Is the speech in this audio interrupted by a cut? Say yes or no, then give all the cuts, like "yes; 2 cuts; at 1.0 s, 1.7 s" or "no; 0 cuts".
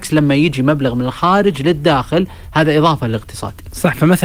no; 0 cuts